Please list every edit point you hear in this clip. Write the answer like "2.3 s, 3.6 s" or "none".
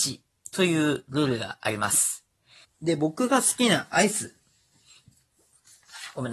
2.6 s